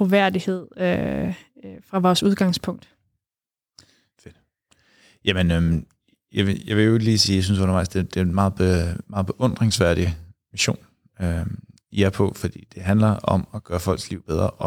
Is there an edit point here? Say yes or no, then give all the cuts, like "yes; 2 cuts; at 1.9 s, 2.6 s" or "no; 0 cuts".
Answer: no; 0 cuts